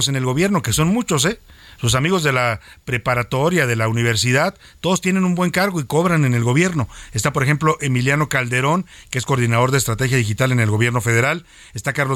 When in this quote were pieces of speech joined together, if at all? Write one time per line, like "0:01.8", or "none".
none